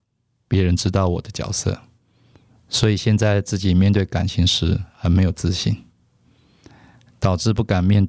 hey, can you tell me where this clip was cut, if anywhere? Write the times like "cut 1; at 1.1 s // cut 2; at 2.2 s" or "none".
cut 1; at 2.6 s